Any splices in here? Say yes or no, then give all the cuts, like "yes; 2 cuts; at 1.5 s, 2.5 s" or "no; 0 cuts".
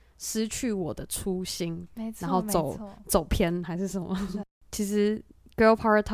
no; 0 cuts